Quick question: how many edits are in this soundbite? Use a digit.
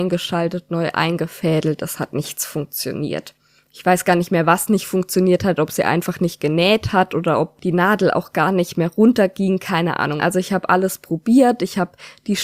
1